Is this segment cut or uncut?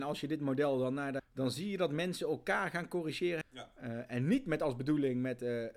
cut